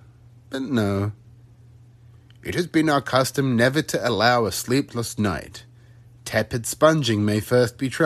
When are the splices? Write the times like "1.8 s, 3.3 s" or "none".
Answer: none